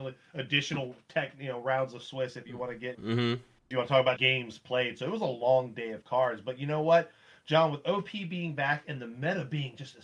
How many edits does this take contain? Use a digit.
2